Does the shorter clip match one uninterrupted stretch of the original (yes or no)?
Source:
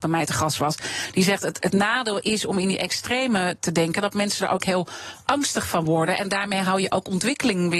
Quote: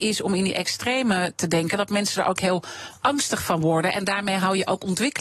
yes